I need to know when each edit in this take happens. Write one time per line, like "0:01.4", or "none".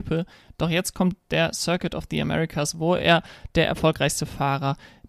none